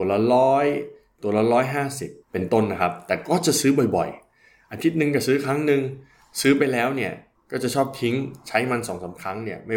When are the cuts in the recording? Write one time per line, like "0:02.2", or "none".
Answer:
0:02.2

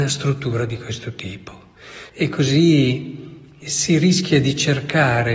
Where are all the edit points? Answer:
0:02.1
0:03.6

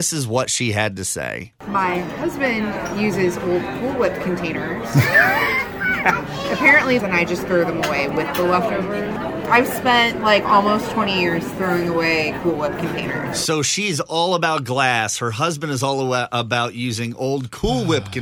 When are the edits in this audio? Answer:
0:07.0

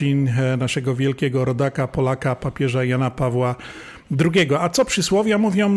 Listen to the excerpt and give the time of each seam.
none

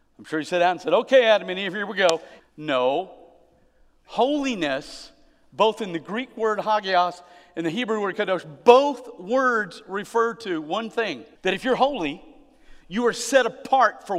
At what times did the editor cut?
0:02.4
0:11.4

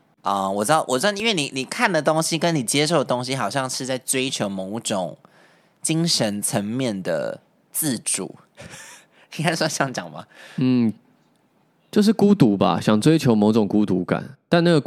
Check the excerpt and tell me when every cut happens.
none

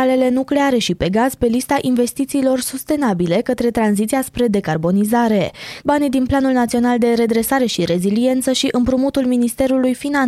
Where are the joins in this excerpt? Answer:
0:05.8

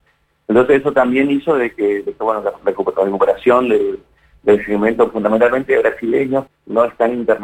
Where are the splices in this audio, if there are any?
0:06.5

